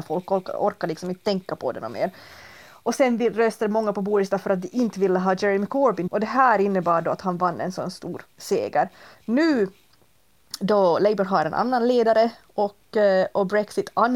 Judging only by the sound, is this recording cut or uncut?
cut